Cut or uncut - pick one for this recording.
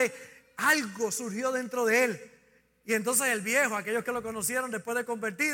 uncut